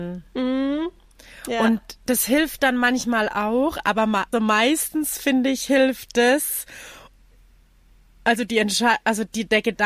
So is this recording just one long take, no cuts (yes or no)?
no